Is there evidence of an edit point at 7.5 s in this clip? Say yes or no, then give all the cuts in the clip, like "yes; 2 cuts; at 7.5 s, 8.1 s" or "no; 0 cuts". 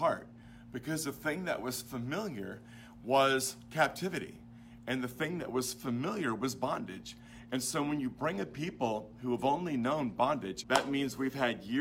no; 1 cut; at 10.6 s